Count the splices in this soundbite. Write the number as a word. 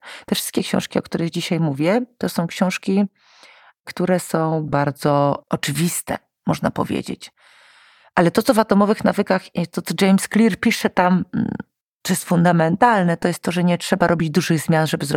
one